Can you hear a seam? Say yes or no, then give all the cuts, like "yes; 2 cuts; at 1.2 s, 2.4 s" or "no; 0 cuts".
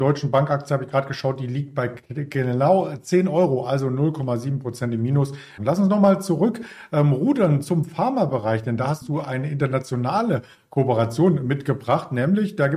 yes; 1 cut; at 5.6 s